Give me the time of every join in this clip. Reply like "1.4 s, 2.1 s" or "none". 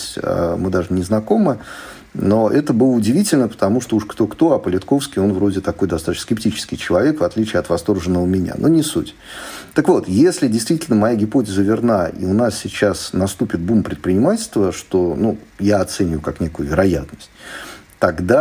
none

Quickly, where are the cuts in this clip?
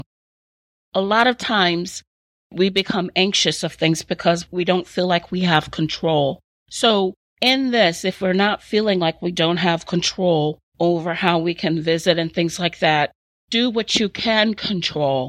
none

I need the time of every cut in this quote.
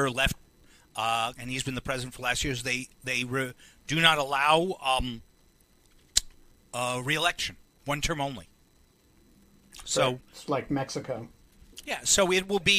1.3 s

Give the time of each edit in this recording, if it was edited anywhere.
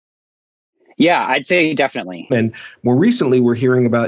2.3 s

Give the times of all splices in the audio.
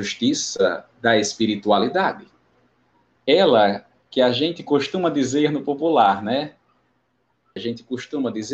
7.6 s

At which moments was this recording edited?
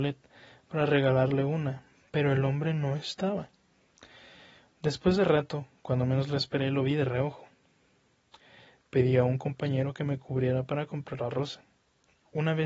none

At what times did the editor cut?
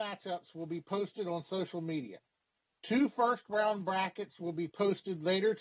none

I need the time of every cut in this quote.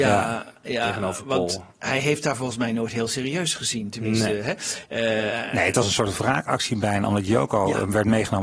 1.7 s

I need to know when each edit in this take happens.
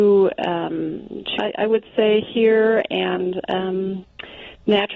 1.4 s

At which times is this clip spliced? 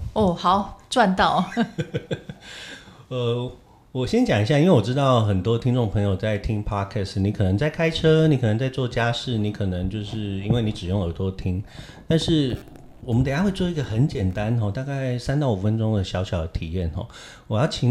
none

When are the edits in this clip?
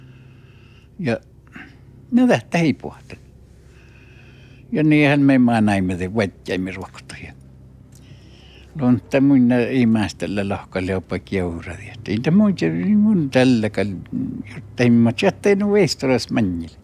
none

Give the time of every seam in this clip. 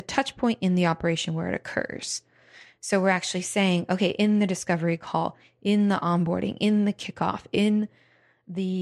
7.5 s

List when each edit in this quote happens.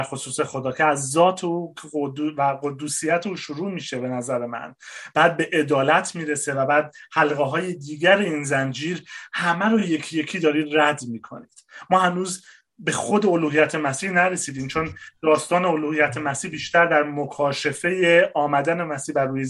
none

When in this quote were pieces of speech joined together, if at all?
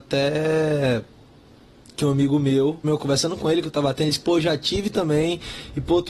2.8 s

